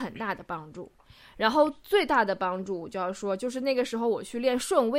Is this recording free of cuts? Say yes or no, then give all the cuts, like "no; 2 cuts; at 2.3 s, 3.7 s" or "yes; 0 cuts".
yes; 0 cuts